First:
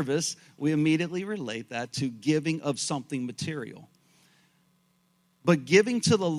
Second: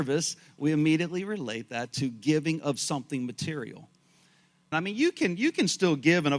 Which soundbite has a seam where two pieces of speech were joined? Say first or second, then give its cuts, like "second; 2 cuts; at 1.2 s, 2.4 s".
second; 1 cut; at 4.7 s